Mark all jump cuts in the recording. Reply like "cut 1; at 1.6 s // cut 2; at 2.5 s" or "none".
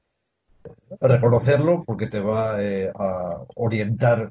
cut 1; at 1.8 s